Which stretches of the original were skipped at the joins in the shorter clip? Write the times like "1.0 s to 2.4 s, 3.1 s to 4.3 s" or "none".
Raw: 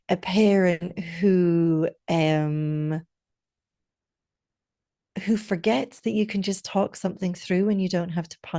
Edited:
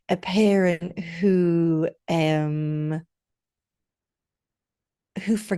none